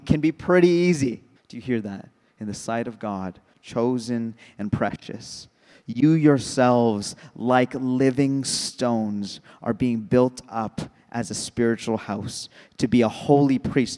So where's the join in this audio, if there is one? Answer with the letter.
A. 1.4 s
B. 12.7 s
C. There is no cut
A